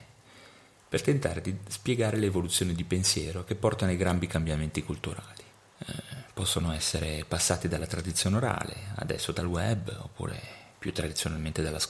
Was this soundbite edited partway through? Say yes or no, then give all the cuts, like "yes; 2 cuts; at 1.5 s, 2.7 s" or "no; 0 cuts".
yes; 1 cut; at 5.7 s